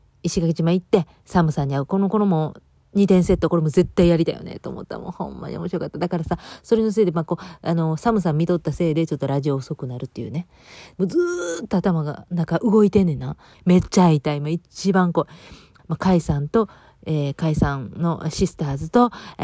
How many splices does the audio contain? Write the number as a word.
three